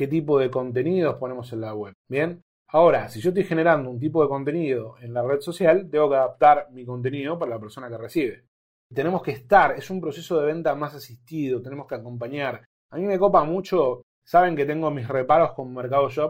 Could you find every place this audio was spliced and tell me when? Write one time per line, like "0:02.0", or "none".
0:02.0
0:08.8